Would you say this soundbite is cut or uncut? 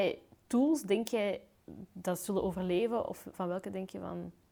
uncut